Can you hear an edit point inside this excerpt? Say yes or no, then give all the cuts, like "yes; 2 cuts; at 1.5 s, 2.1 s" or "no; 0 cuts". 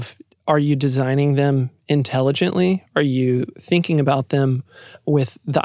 no; 0 cuts